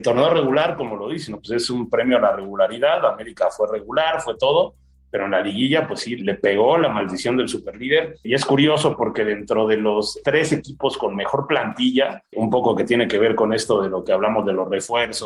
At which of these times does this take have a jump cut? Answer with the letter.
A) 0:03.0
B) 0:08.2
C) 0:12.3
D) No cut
D